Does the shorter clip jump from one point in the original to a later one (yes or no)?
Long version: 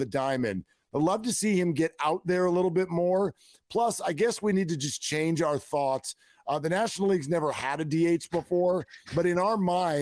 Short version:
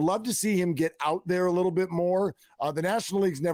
yes